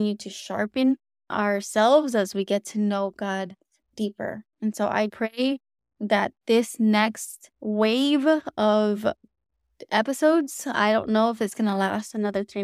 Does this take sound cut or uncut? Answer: cut